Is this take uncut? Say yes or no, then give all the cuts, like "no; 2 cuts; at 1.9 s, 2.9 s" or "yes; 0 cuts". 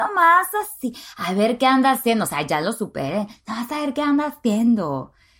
yes; 0 cuts